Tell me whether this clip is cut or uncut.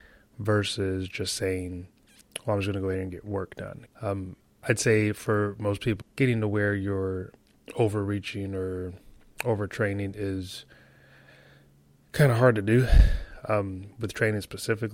cut